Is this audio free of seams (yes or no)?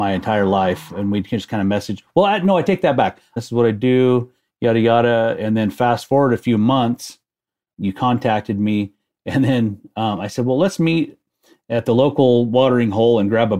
no